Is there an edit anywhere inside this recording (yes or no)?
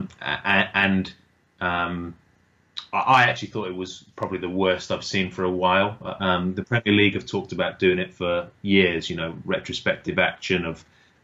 yes